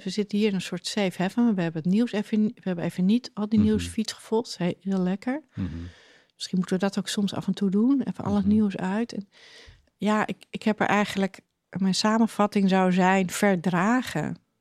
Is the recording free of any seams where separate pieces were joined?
yes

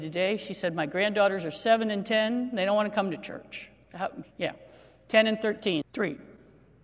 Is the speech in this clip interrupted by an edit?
yes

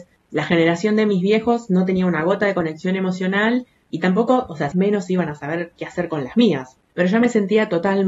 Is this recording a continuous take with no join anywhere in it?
no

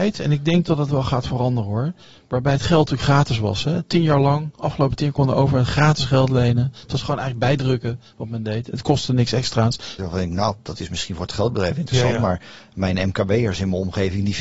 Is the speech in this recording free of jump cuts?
no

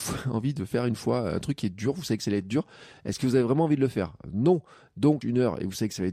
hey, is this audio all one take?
no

